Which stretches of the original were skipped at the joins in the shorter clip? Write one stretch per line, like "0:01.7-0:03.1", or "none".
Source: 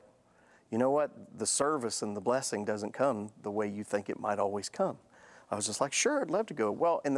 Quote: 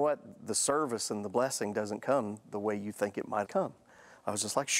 0:04.4-0:04.7